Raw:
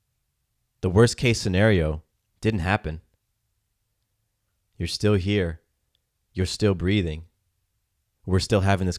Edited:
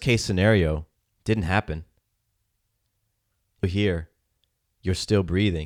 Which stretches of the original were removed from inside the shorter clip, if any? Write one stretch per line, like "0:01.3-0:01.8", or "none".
0:04.8-0:05.1